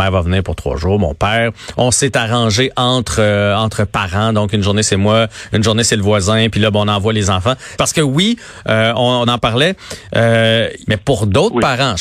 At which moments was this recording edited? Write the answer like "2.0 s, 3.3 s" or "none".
7.8 s, 9.3 s, 10.9 s